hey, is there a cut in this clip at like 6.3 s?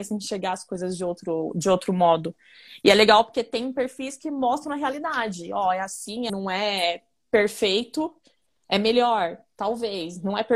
yes; 1 cut; at 6.3 s

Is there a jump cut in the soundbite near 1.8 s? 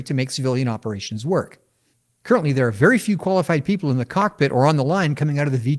no; 0 cuts

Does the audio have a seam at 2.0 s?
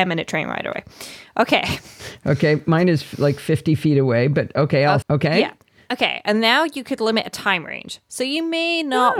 no; 1 cut; at 5.0 s

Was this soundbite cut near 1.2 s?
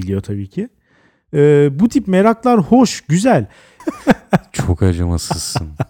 no; 1 cut; at 3.8 s

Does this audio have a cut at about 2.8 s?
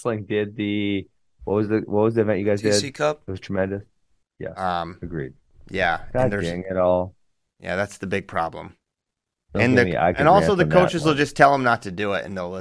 no; 1 cut; at 4.2 s

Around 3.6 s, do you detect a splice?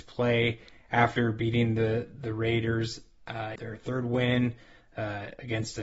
yes; 1 cut; at 3.6 s

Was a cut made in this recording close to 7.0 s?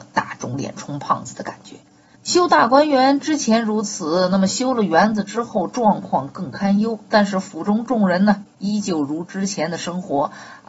no; 1 cut; at 2.2 s

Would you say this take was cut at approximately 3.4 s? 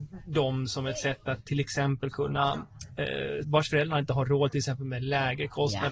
yes; 1 cut; at 3.4 s

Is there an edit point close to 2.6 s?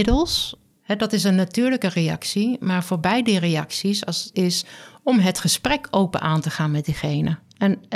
no; 1 cut; at 4.3 s

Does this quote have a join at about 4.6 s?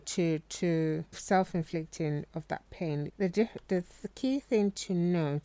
no; 2 cuts; at 1.1 s, 3.1 s

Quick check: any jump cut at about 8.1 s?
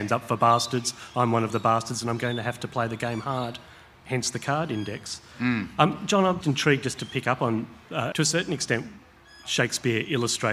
yes; 2 cuts; at 6.4 s, 8.1 s

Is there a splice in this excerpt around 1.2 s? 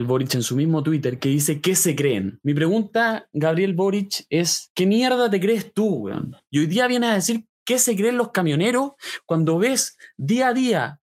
no; 1 cut; at 6.5 s

